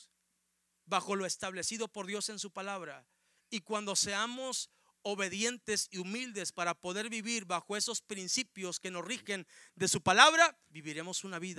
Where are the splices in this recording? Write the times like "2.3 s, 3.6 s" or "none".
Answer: 10.7 s